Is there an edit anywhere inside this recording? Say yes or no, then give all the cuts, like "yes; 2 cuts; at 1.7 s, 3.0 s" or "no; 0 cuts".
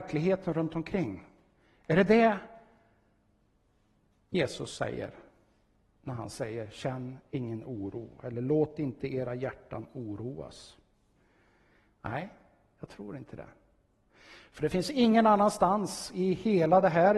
no; 0 cuts